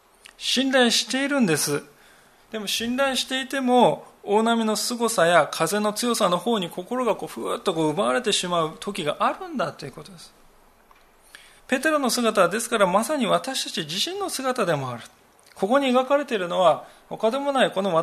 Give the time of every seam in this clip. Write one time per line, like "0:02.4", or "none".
0:11.6